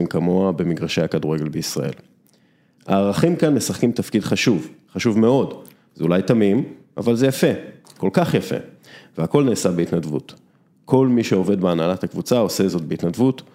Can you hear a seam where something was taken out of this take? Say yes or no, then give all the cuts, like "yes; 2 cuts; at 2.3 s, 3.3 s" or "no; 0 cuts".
yes; 1 cut; at 2.8 s